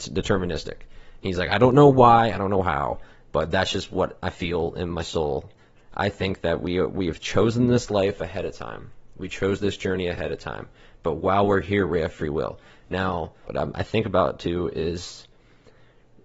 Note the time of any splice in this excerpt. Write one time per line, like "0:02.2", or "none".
0:05.7
0:13.4